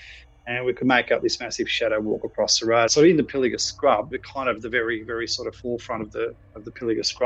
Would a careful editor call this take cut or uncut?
cut